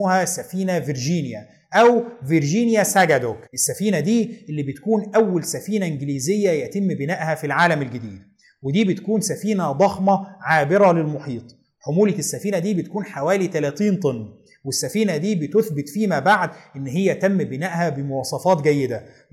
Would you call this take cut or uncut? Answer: cut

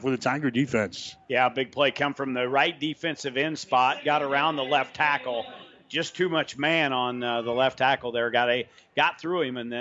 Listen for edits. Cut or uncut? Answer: uncut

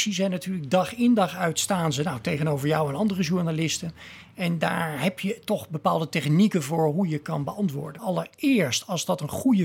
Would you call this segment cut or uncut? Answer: cut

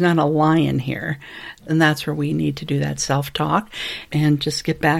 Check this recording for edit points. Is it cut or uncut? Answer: cut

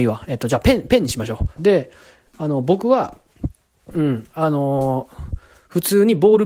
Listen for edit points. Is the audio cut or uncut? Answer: cut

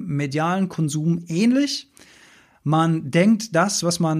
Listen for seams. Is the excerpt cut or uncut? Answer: uncut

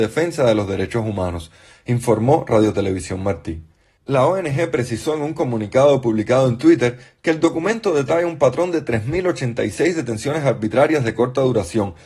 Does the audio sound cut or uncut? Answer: uncut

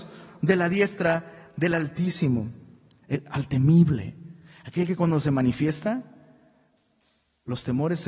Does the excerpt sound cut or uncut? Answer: cut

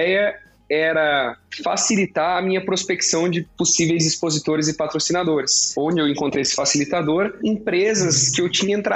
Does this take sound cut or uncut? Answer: uncut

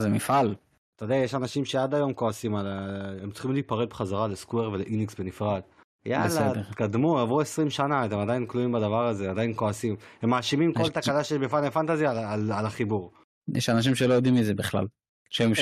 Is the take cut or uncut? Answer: uncut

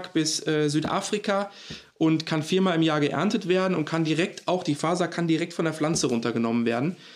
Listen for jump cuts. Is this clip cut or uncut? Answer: uncut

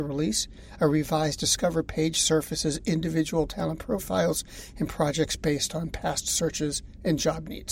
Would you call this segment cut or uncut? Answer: uncut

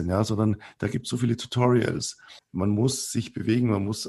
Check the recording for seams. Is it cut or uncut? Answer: cut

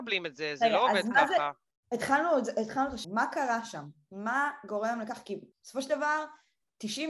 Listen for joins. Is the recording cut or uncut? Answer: cut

